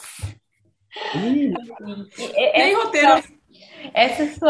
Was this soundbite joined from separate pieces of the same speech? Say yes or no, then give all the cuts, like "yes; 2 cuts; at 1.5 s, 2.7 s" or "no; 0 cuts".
yes; 2 cuts; at 1.5 s, 3.2 s